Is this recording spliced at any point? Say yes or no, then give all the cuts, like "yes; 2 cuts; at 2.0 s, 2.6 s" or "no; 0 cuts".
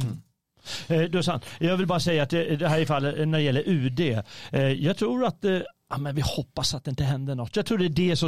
no; 0 cuts